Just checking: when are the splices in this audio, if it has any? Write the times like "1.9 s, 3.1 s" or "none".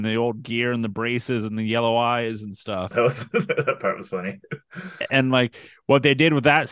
2.9 s